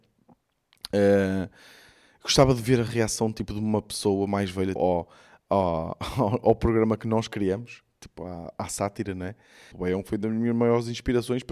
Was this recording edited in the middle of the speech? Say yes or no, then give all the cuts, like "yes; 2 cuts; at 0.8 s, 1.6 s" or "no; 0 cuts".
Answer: yes; 2 cuts; at 4.8 s, 9.7 s